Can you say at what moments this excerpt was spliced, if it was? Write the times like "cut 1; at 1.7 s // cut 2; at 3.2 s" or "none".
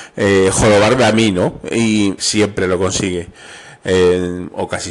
cut 1; at 2.2 s

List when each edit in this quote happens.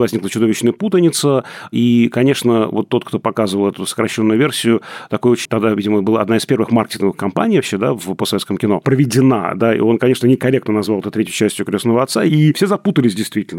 cut 1; at 5.5 s

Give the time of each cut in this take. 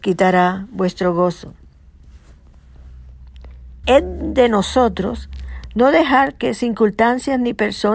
cut 1; at 3.8 s

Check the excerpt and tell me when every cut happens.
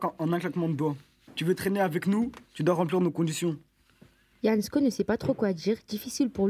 none

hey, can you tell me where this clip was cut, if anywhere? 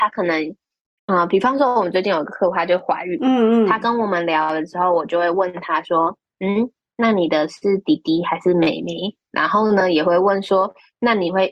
none

